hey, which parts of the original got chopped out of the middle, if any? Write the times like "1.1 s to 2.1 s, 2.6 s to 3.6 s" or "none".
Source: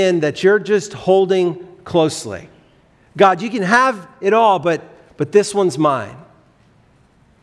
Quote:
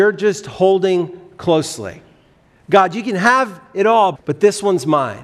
4.6 s to 5.1 s